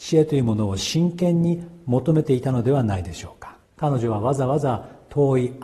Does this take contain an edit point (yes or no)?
yes